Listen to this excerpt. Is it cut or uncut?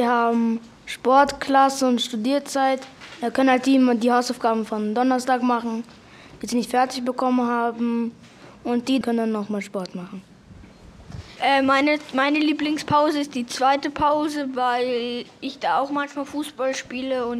cut